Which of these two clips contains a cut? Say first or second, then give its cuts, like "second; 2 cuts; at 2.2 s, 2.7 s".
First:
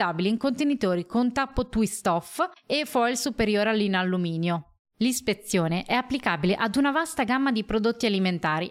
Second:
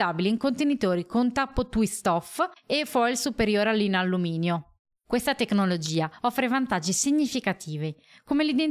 second; 1 cut; at 4.9 s